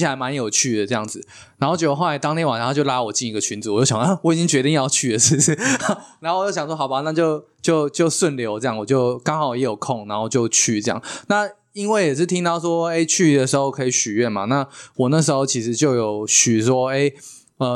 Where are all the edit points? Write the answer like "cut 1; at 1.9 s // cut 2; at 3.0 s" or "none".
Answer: none